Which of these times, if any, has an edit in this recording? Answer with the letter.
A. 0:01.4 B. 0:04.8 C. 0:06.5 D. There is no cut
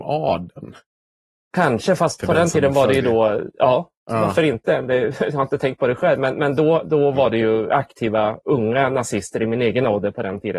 D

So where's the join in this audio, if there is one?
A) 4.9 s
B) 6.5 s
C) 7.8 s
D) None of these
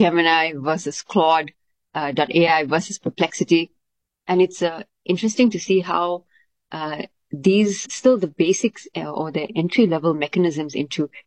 C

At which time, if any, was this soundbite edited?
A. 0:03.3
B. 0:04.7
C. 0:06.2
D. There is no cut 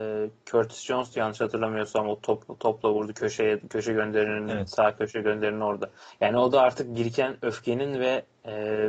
D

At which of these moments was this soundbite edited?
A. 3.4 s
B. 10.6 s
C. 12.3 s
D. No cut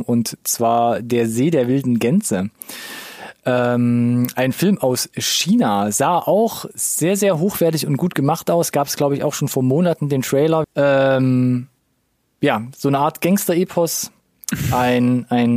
B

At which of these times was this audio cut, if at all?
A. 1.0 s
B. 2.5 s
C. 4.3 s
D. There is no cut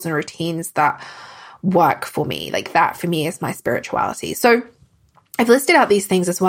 D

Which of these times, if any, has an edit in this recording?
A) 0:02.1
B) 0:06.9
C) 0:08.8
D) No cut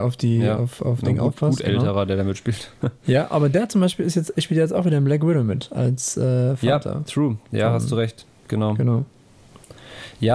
D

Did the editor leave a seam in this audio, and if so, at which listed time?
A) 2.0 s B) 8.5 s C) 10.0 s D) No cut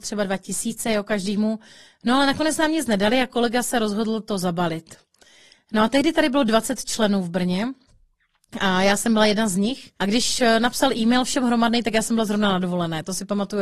C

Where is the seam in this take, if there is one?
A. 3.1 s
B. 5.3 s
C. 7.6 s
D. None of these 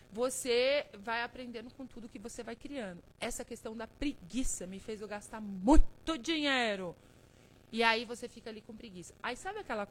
A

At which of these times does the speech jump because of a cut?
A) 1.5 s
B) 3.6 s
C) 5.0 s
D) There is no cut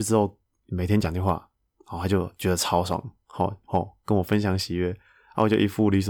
B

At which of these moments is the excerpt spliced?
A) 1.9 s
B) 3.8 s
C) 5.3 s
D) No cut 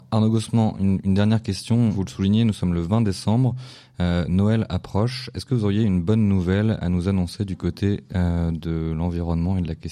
A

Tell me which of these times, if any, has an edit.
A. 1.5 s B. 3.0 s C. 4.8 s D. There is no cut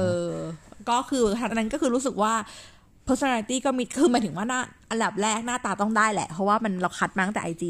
A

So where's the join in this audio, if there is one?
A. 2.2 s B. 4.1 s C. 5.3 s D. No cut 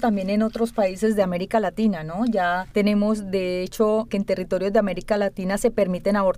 B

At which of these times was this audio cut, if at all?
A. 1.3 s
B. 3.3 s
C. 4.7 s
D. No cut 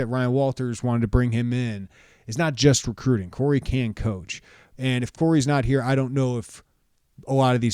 C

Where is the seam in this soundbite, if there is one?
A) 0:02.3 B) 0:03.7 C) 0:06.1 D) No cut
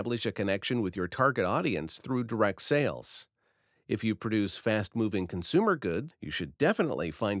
C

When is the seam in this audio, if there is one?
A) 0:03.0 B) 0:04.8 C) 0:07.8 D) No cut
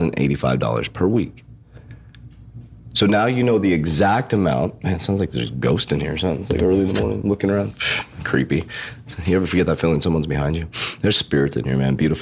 D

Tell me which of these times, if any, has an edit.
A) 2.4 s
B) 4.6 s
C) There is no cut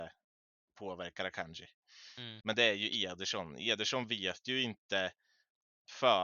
A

